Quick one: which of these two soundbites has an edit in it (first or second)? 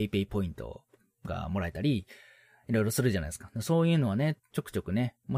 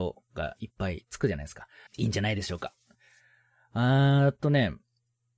second